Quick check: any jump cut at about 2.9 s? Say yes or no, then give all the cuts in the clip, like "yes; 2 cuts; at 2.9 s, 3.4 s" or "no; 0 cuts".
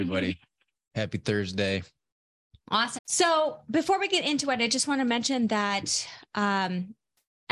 yes; 1 cut; at 2.9 s